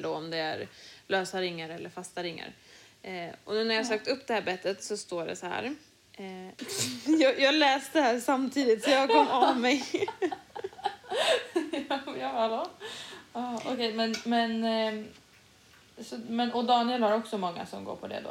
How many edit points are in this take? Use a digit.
1